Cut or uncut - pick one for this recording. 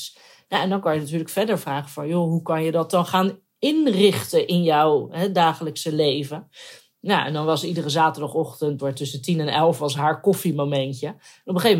cut